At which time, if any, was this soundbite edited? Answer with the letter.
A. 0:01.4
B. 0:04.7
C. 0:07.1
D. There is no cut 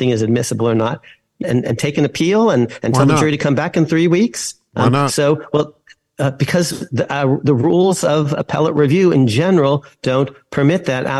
A